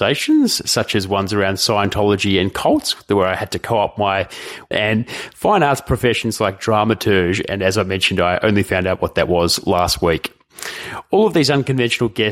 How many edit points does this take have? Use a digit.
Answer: 1